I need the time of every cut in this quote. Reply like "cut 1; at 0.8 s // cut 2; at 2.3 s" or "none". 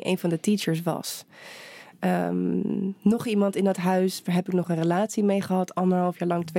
none